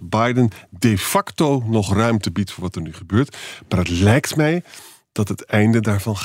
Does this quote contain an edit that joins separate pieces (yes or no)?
no